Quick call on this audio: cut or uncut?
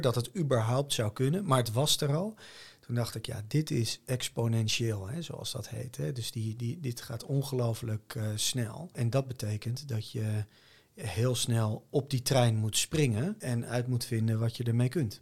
uncut